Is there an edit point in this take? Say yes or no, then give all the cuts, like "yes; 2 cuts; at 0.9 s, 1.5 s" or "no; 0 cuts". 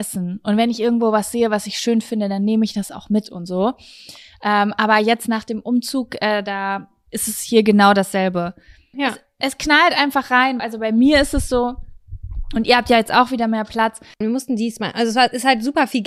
yes; 3 cuts; at 8.9 s, 10.6 s, 14.2 s